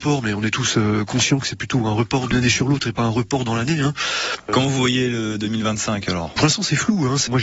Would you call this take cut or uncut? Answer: uncut